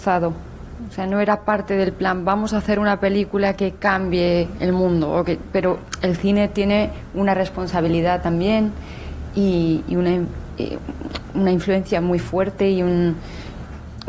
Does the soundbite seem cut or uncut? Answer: uncut